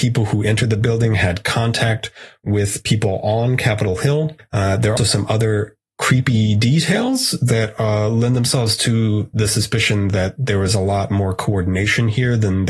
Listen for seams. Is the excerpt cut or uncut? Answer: cut